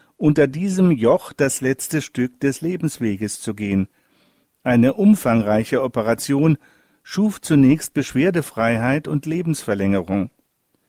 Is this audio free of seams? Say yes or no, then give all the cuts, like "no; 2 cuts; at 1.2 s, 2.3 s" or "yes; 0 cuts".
yes; 0 cuts